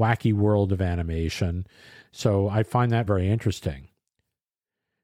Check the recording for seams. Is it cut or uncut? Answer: cut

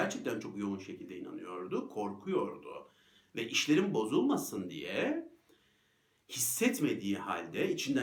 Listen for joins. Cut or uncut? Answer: uncut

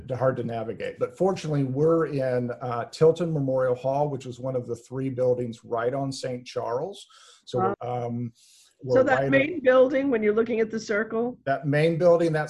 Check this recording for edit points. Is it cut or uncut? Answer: cut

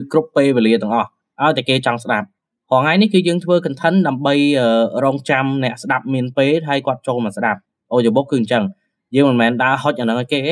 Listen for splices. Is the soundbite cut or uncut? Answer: uncut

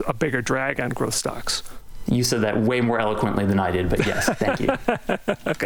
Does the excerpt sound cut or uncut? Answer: uncut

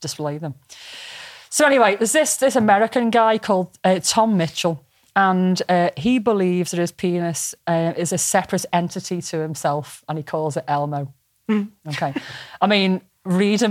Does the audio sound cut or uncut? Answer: uncut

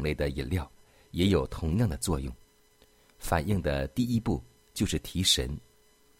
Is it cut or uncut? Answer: uncut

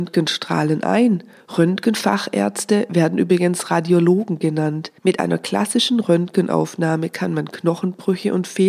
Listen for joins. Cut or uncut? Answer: cut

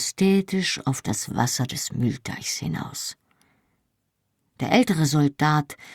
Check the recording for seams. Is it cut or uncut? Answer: uncut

